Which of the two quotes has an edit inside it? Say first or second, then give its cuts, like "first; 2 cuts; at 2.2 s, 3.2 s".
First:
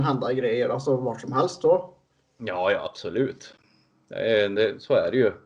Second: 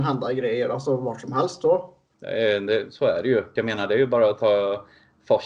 second; 2 cuts; at 2.1 s, 3.6 s